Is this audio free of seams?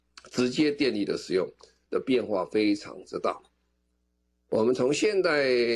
no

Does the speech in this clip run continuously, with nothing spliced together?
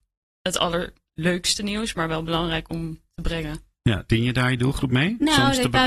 yes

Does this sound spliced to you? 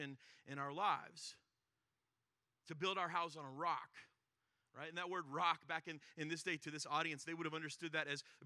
no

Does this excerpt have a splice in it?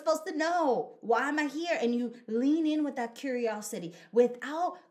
no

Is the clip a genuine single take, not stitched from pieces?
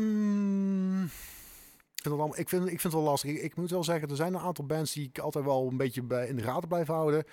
no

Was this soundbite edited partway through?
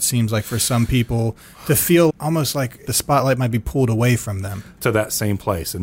yes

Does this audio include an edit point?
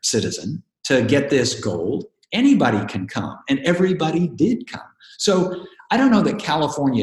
no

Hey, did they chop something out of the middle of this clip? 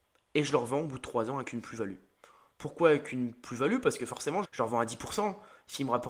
yes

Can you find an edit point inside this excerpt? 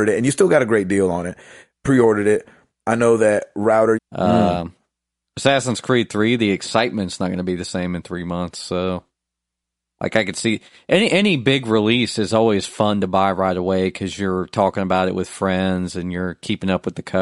yes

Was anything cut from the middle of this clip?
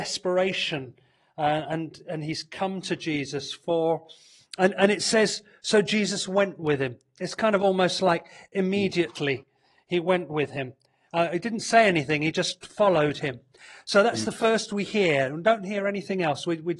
no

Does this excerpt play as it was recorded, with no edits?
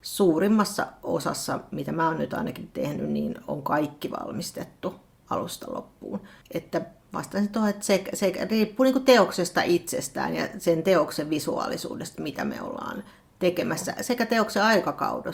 yes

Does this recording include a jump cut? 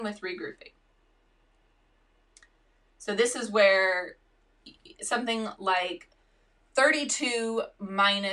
no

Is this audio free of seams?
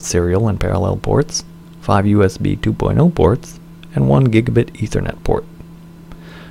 yes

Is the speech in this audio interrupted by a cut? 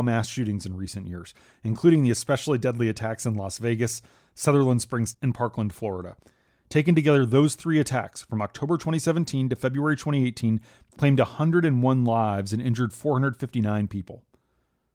yes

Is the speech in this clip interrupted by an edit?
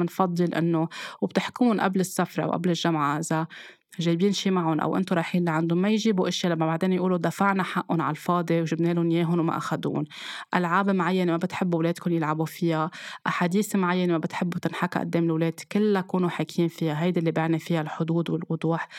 no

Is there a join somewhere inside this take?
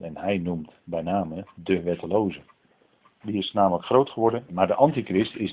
yes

